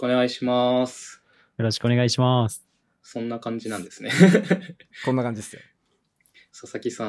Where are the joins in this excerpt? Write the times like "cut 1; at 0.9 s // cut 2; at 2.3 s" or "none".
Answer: none